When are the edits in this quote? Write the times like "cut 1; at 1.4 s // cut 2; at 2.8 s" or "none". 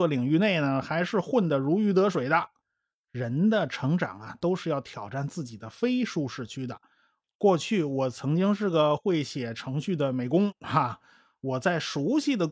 cut 1; at 3.0 s // cut 2; at 7.2 s